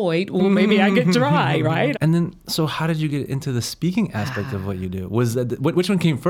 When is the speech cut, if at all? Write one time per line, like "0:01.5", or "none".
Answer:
0:01.9

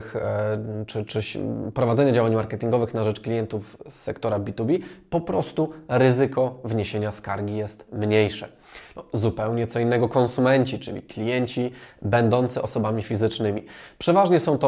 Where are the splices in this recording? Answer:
0:01.0

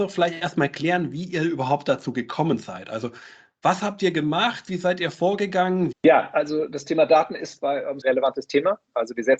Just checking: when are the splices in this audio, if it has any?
0:05.9
0:08.0

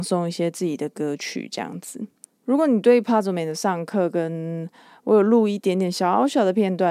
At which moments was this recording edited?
none

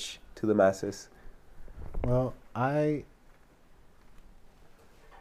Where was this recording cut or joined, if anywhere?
none

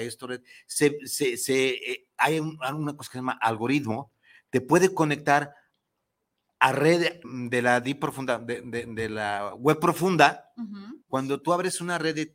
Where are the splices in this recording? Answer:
0:07.2
0:11.0

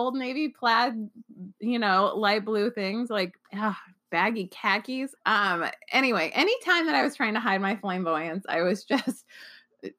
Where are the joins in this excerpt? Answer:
0:03.4
0:05.2

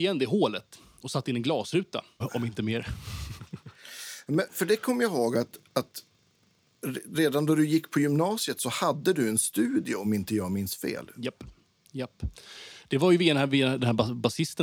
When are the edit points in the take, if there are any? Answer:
0:02.2

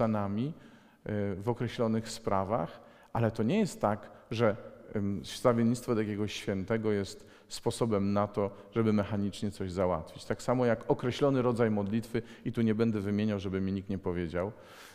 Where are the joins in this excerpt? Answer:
none

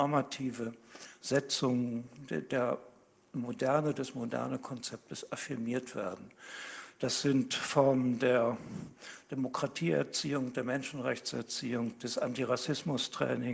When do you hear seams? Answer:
none

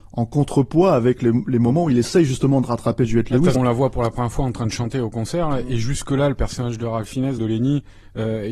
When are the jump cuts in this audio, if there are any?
0:03.5
0:07.4

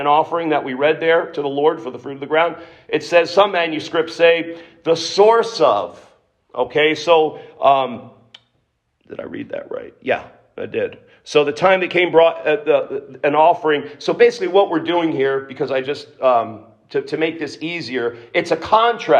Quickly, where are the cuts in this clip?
none

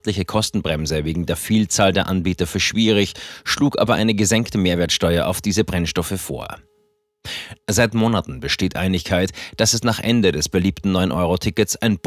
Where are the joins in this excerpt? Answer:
0:07.6

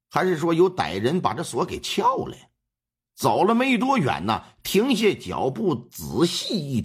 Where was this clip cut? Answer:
0:03.0
0:04.6

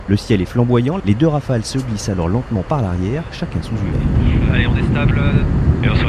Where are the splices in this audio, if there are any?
0:01.0

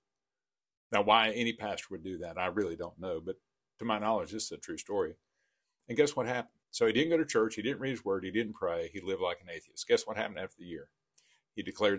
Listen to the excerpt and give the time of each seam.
0:06.6

